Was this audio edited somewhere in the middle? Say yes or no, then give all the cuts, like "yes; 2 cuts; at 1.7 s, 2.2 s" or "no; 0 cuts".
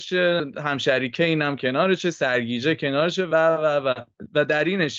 no; 0 cuts